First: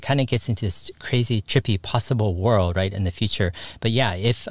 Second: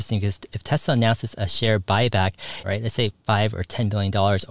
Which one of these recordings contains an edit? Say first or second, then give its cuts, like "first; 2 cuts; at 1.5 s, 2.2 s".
second; 1 cut; at 2.6 s